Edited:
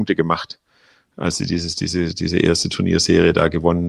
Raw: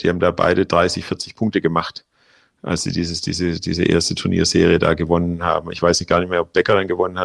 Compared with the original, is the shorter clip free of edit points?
yes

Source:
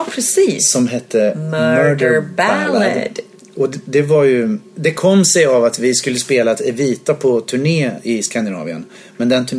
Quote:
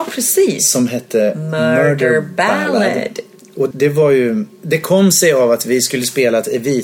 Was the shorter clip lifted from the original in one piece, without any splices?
no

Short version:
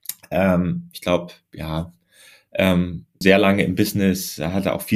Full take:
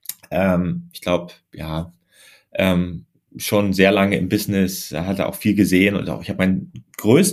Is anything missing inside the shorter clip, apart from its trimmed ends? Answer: yes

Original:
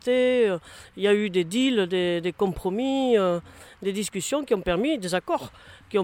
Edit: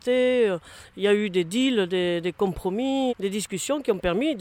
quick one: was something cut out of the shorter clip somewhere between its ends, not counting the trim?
yes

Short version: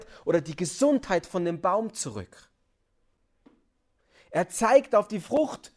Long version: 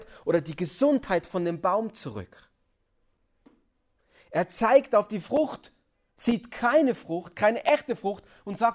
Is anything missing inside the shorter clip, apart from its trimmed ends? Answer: no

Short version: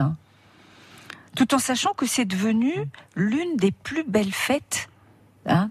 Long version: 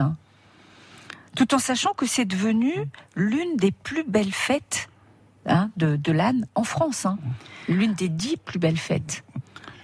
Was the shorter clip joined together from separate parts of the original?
no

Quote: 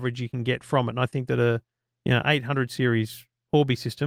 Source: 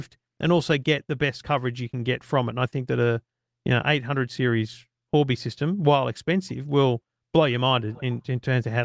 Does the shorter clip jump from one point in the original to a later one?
no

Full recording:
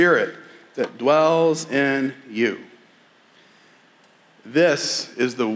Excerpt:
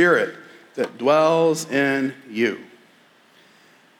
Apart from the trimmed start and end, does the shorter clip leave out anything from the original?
no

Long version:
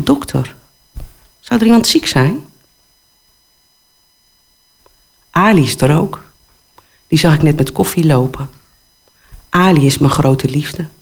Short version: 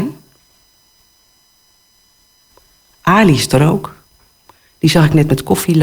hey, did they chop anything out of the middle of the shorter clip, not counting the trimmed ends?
no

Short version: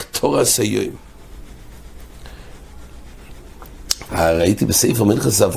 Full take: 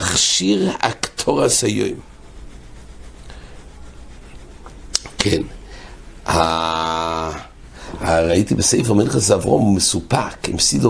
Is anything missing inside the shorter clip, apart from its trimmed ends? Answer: yes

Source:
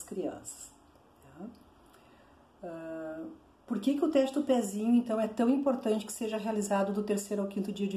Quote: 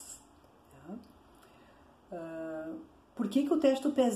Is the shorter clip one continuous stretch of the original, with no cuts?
yes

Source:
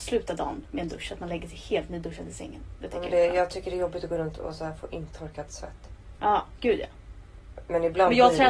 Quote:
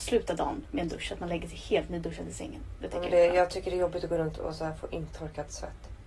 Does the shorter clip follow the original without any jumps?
yes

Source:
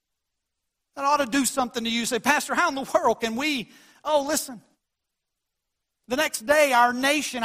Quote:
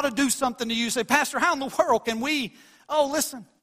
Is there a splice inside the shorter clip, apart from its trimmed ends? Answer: no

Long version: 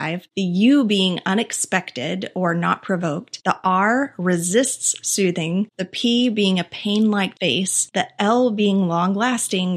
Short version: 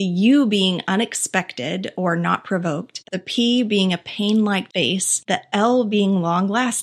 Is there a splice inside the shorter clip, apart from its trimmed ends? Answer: yes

